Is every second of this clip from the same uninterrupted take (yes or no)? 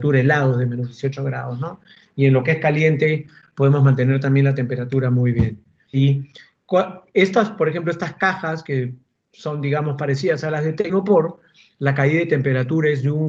no